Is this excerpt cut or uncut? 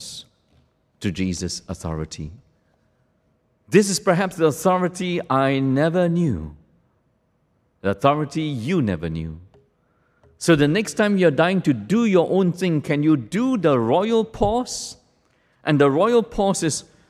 uncut